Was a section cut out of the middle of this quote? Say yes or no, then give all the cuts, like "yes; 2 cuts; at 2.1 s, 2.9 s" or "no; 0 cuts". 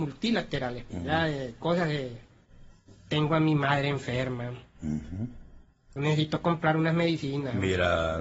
yes; 2 cuts; at 0.9 s, 6.0 s